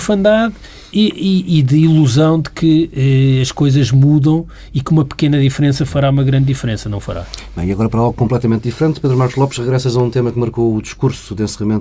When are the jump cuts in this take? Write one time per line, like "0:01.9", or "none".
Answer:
none